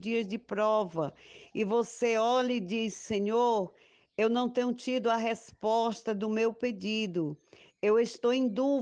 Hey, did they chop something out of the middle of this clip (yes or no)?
no